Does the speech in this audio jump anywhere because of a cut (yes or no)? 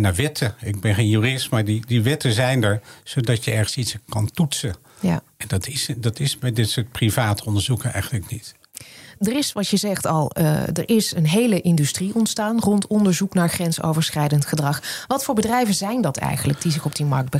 no